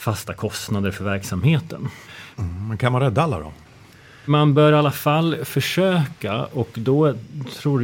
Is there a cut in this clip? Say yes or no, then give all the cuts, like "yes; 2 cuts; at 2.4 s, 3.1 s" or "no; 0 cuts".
yes; 1 cut; at 2.3 s